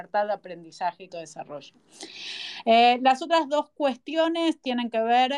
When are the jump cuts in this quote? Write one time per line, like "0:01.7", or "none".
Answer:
0:01.1